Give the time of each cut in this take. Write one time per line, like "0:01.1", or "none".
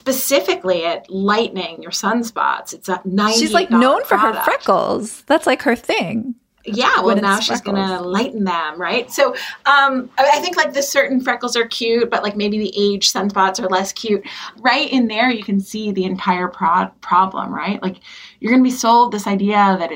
none